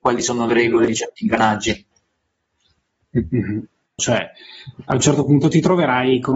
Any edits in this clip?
yes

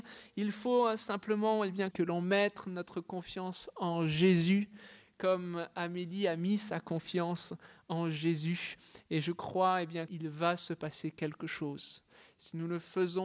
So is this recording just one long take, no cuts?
no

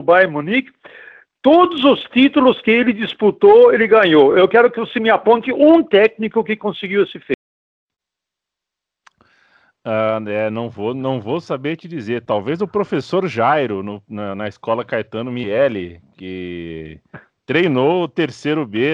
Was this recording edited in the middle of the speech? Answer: no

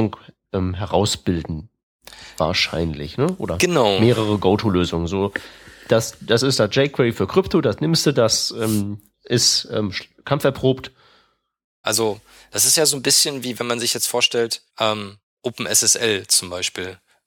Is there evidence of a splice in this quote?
yes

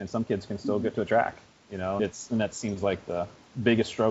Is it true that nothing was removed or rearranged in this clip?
no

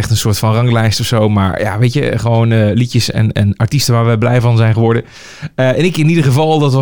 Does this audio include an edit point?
no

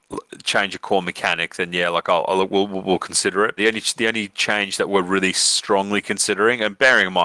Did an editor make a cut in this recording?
yes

